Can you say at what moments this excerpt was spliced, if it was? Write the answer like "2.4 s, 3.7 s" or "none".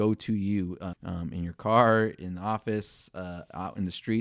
0.9 s

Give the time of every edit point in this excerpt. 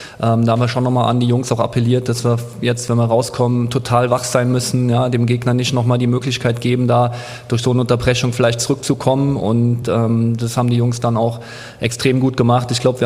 none

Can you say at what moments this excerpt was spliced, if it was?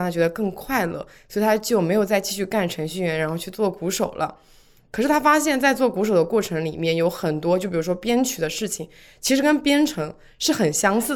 none

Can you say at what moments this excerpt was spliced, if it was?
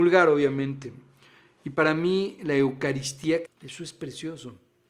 3.5 s

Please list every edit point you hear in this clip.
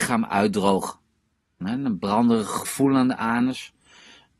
1.6 s

